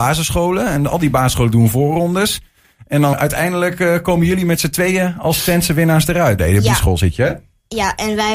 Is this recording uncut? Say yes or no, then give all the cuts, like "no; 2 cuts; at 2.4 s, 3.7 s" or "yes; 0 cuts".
no; 2 cuts; at 3.1 s, 6.4 s